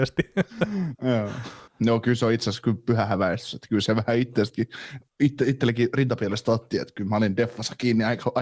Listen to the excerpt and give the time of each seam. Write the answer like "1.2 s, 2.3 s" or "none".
1.7 s